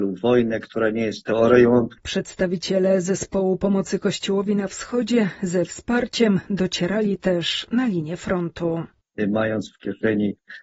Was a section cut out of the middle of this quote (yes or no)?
no